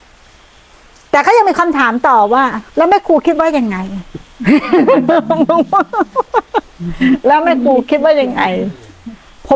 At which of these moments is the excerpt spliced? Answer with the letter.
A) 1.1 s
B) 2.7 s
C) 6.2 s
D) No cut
B